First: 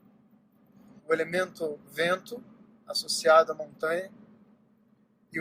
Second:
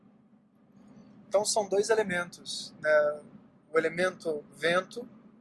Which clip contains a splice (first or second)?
first